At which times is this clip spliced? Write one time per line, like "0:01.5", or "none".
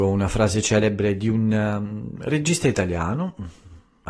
none